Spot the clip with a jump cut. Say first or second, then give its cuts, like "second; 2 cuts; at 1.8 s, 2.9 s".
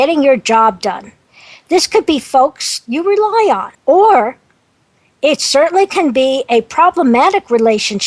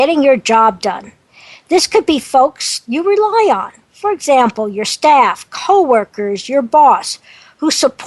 first; 1 cut; at 3.7 s